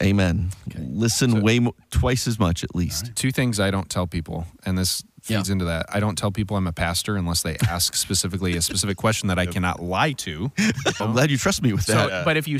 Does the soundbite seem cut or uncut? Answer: cut